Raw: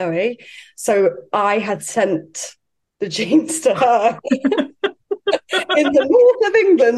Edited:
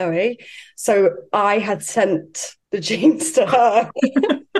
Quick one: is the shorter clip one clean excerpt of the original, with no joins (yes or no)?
no